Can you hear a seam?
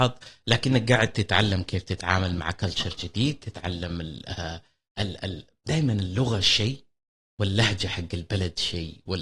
no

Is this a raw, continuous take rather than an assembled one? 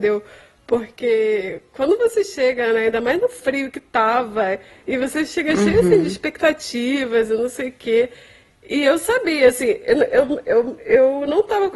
yes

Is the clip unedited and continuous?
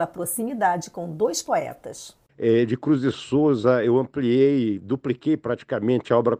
no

